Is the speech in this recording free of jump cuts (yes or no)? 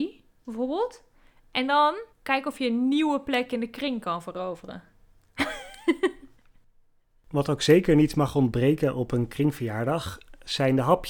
no